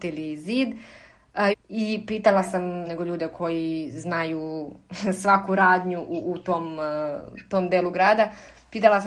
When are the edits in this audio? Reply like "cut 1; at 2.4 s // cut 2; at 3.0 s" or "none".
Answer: cut 1; at 1.5 s // cut 2; at 2.8 s